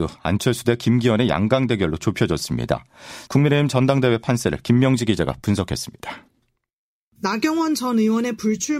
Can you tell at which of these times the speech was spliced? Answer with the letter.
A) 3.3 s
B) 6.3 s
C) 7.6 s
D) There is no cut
A